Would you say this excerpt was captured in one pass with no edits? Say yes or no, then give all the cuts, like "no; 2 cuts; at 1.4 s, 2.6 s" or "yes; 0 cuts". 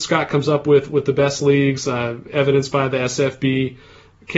yes; 0 cuts